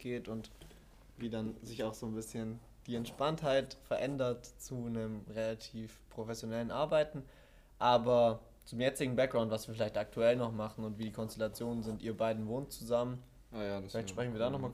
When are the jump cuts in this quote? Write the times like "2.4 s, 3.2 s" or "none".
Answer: none